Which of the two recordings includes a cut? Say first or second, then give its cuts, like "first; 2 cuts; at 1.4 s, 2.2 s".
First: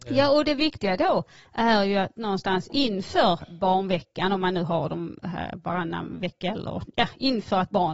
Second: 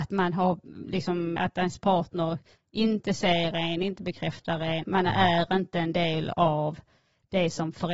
second; 2 cuts; at 1.4 s, 4.8 s